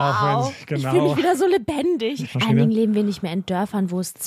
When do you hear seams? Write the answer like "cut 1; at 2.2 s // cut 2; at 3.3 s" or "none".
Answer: cut 1; at 2.3 s